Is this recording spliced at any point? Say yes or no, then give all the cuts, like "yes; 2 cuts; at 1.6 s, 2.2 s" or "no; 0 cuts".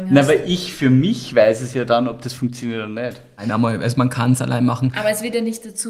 no; 0 cuts